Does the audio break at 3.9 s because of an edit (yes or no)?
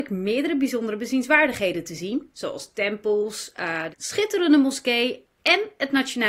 yes